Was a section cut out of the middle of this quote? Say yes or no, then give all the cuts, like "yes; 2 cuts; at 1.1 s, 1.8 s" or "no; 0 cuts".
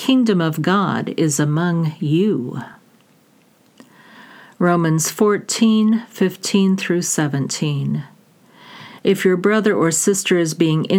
no; 0 cuts